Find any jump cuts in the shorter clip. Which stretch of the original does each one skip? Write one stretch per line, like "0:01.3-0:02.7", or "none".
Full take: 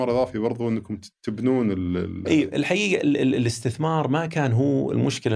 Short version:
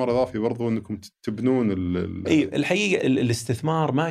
0:03.0-0:03.2